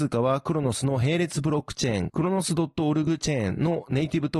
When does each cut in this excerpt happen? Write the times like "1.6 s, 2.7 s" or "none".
none